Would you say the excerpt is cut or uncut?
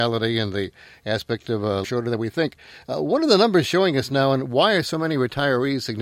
cut